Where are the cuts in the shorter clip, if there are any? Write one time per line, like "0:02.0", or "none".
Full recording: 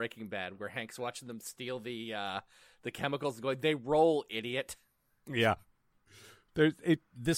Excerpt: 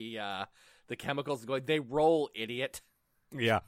none